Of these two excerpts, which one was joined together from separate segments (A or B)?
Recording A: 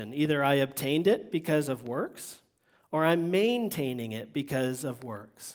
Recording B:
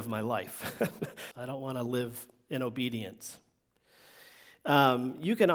B